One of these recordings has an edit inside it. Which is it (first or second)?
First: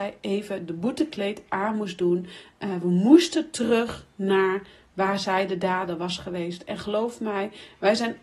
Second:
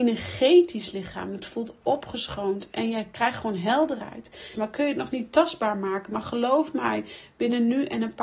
second